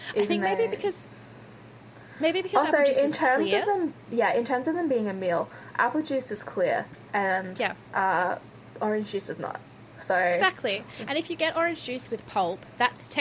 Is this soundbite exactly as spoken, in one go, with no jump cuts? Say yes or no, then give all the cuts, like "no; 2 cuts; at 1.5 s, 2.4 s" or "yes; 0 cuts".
yes; 0 cuts